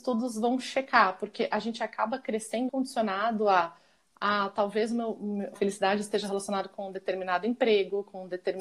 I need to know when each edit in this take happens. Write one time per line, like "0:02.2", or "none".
0:02.7
0:05.6